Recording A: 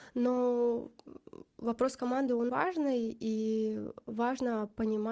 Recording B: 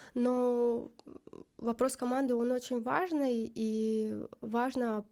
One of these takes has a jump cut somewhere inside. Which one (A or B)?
A